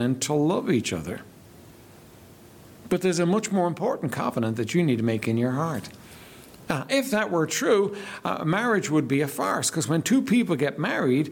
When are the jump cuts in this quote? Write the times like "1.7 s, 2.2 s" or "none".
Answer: 6.7 s